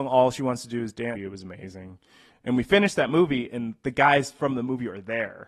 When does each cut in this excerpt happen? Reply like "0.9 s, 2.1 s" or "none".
1.1 s